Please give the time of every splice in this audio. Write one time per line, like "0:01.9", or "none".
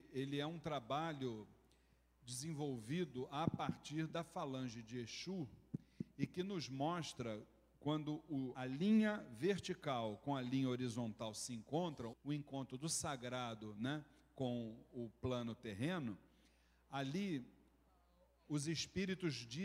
0:08.5
0:12.1